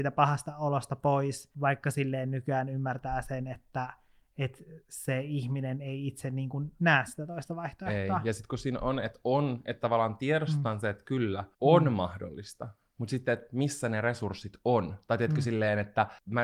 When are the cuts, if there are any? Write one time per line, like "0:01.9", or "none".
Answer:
none